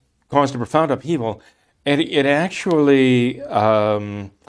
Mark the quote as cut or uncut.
uncut